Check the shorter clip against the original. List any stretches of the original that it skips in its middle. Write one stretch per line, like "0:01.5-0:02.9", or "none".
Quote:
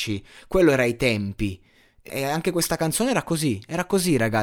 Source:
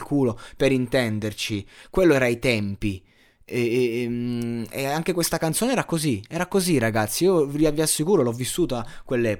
0:03.5-0:04.7